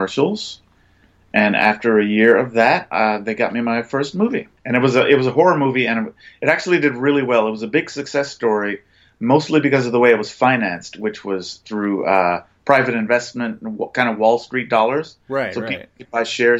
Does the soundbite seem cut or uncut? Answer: cut